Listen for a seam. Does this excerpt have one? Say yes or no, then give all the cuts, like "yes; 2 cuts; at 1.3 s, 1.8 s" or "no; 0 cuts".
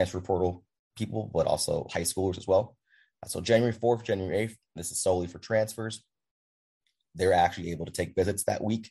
no; 0 cuts